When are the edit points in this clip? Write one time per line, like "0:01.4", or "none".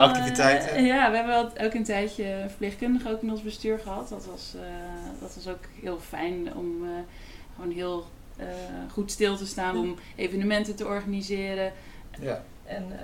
0:09.7
0:12.1